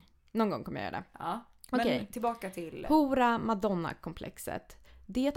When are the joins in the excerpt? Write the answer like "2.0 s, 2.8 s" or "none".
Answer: none